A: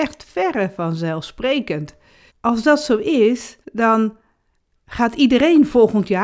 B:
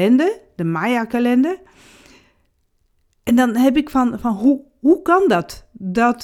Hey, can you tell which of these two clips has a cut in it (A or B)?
A